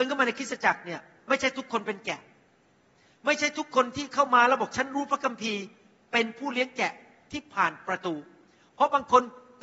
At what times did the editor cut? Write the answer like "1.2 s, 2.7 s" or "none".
none